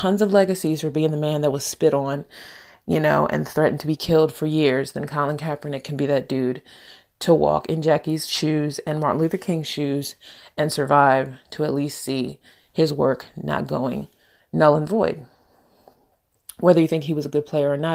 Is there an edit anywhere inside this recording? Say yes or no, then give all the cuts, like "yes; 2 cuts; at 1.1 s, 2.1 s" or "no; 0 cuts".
no; 0 cuts